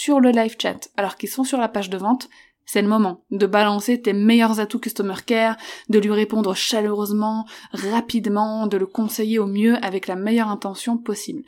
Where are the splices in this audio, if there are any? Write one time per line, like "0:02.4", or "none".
none